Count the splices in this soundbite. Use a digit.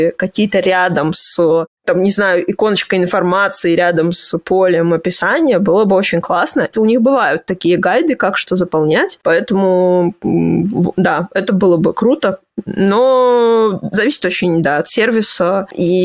1